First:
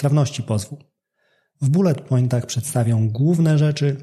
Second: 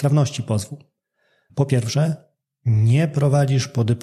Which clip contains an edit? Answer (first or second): second